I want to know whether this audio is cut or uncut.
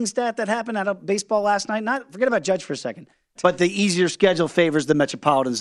cut